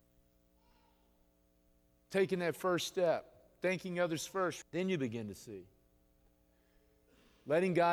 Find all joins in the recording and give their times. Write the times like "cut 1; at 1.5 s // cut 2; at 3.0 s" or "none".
cut 1; at 4.6 s